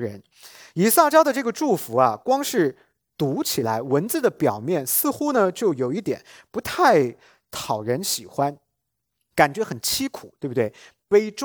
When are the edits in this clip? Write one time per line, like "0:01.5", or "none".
none